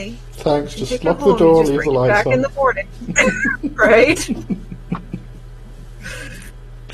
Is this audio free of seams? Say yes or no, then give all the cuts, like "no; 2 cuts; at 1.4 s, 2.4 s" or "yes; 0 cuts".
yes; 0 cuts